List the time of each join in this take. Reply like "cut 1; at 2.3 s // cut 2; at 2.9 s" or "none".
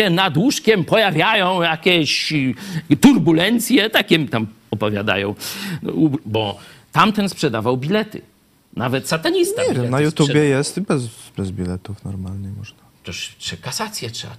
cut 1; at 6.2 s

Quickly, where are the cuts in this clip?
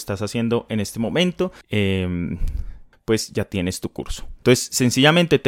cut 1; at 1.6 s // cut 2; at 2.9 s // cut 3; at 4.4 s

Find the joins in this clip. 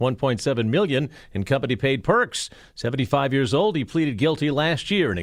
none

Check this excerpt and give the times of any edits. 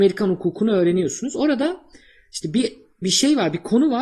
none

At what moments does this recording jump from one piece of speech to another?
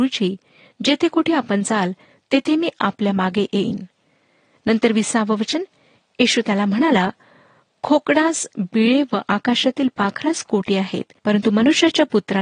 cut 1; at 11.2 s

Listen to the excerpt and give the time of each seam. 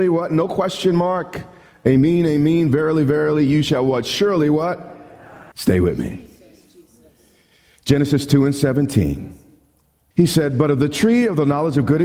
cut 1; at 5.5 s // cut 2; at 10.1 s

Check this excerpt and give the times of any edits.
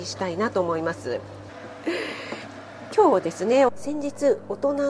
cut 1; at 1.5 s // cut 2; at 3.7 s

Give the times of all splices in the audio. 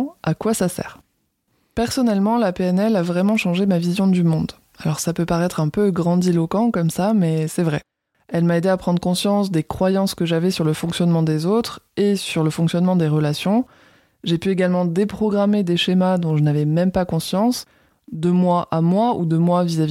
cut 1; at 8.1 s // cut 2; at 17.9 s

